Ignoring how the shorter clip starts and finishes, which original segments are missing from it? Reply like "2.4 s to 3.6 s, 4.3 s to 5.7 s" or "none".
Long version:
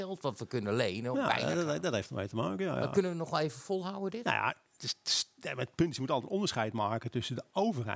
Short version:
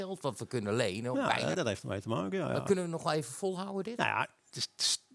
1.5 s to 1.8 s